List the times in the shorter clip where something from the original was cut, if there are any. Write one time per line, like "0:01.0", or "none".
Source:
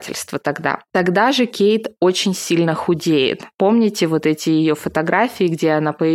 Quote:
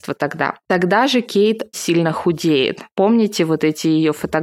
0:01.7